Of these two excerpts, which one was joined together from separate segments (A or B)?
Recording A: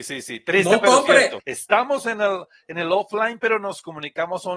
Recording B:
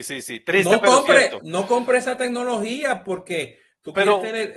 A